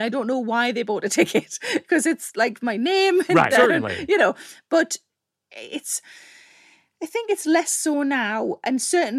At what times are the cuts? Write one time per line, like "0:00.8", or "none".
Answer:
0:03.5